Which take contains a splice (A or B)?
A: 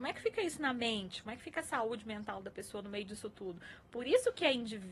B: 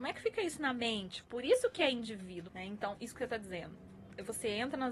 B